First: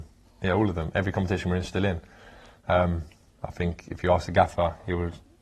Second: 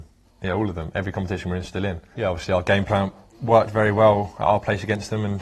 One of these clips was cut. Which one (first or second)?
second